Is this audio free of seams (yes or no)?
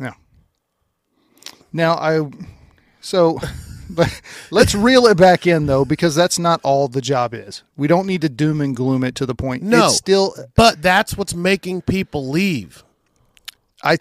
yes